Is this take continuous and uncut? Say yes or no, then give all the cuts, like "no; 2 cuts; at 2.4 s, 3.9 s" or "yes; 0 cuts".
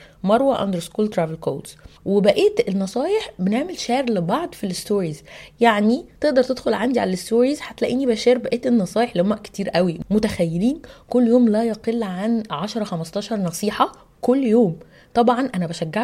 no; 1 cut; at 2.0 s